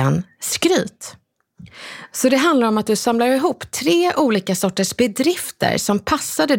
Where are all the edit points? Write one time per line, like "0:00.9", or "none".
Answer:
none